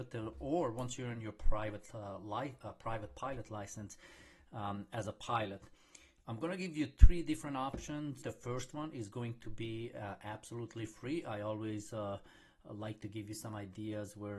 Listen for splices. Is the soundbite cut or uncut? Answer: cut